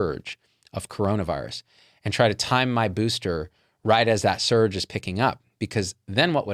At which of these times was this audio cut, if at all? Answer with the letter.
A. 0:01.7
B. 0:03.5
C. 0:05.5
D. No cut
D